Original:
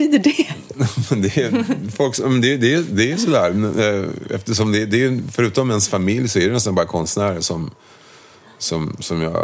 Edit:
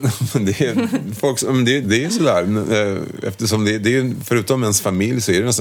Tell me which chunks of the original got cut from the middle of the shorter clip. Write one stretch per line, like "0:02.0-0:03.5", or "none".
0:02.6-0:02.9